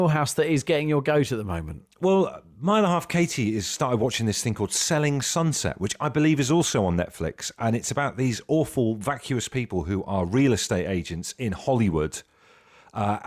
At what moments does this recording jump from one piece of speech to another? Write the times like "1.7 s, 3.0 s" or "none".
none